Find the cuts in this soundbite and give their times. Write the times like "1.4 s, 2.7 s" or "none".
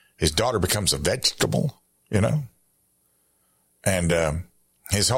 none